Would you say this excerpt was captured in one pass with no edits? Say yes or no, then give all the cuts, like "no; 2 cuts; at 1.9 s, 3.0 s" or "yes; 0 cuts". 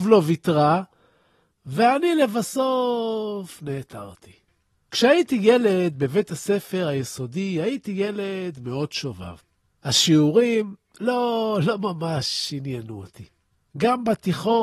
yes; 0 cuts